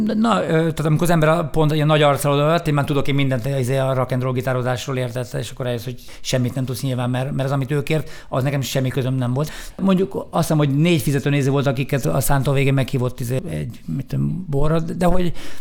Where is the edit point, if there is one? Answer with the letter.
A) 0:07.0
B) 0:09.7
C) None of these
B